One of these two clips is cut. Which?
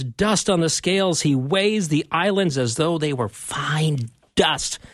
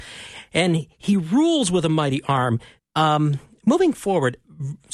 second; 1 cut; at 2.8 s

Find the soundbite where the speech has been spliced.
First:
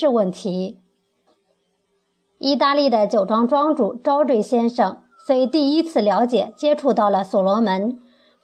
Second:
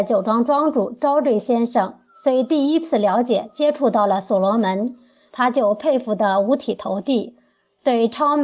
second; 1 cut; at 5.3 s

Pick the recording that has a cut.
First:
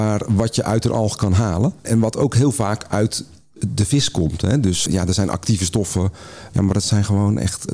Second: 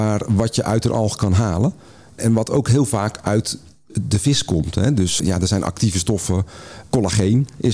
first; 2 cuts; at 1.8 s, 6.5 s

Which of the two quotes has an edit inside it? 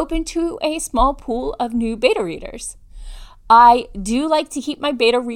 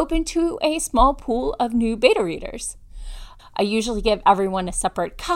second; 1 cut; at 3.4 s

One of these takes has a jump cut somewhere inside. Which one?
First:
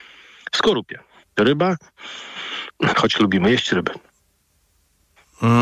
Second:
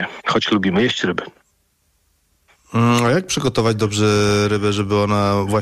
first; 2 cuts; at 1.2 s, 2.9 s

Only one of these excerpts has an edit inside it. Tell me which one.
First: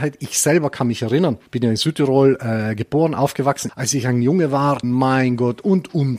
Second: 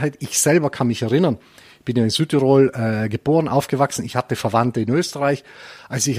first; 3 cuts; at 1.5 s, 3.7 s, 4.8 s

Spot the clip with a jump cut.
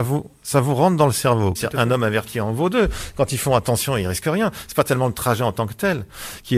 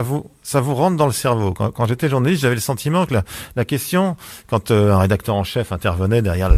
first; 1 cut; at 1.6 s

